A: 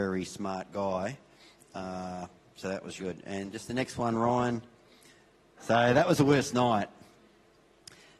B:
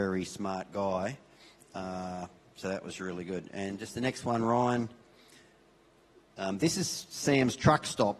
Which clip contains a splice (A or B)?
A